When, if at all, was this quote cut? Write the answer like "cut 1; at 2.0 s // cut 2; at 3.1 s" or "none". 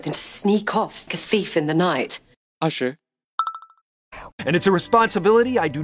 cut 1; at 1.1 s // cut 2; at 4.3 s